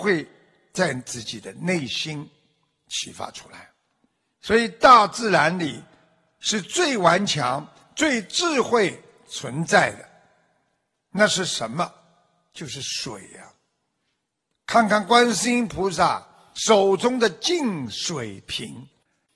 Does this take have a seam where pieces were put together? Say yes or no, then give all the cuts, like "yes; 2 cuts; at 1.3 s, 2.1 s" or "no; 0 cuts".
yes; 1 cut; at 14.5 s